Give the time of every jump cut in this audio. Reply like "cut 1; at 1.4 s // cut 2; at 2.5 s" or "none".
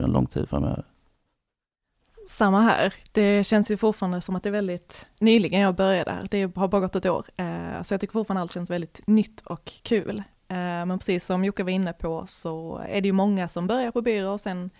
none